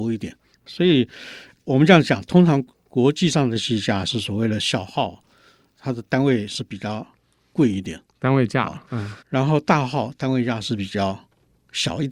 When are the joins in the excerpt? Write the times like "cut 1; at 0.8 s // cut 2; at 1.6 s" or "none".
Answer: cut 1; at 9.2 s